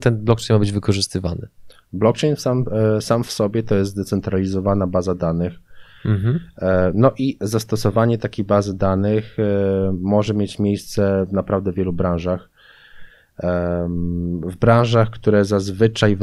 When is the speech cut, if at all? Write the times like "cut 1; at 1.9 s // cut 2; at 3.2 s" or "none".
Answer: none